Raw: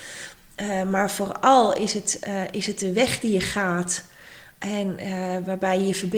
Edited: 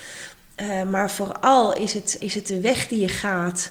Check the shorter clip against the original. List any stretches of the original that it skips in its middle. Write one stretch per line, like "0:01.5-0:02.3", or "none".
0:02.2-0:02.5